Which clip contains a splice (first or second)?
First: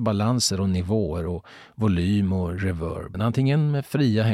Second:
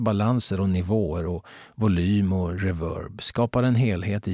first